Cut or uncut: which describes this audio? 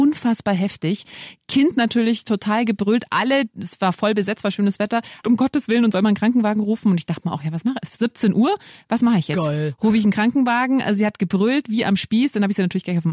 cut